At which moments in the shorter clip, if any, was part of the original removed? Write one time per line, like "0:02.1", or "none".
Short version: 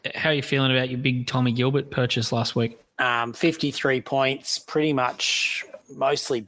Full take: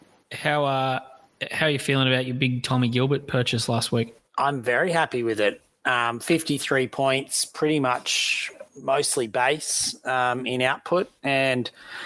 0:02.9